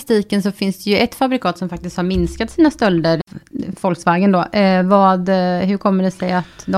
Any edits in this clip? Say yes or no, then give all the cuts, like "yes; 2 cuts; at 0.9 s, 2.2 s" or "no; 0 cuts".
no; 0 cuts